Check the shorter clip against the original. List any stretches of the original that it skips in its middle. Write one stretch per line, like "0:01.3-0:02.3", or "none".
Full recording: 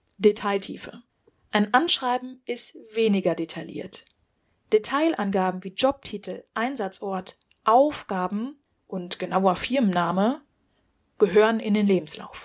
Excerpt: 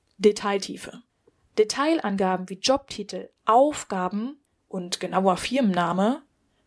0:01.5-0:04.6
0:06.5-0:07.5